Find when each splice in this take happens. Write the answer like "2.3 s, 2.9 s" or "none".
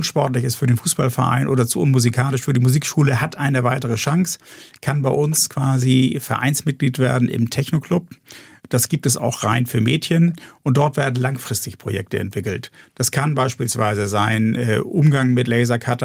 none

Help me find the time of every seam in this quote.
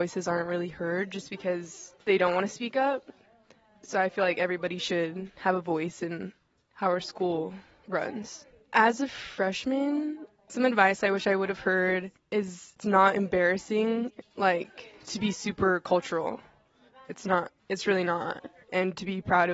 2.0 s

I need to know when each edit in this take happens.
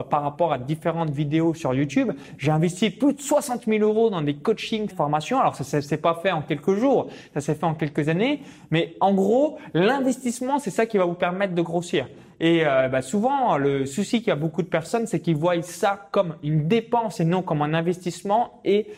4.9 s

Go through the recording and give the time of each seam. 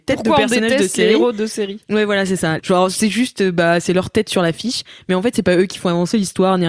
2.6 s

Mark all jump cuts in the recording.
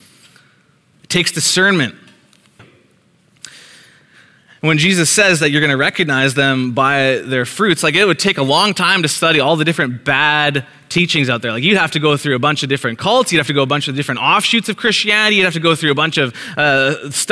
0.9 s, 2.6 s

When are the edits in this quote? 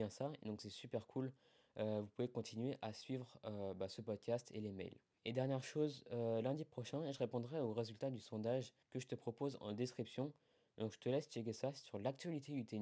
8.8 s

